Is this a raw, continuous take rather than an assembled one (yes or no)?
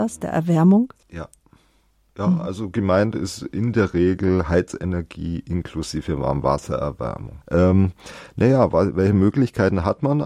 no